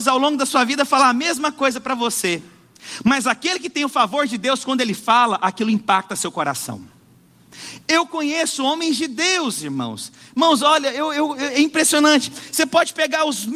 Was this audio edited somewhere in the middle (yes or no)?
no